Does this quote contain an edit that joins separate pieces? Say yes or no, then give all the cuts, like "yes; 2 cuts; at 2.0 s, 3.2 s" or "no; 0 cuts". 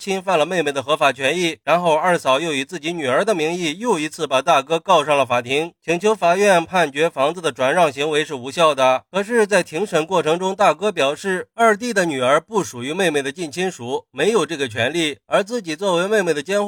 no; 0 cuts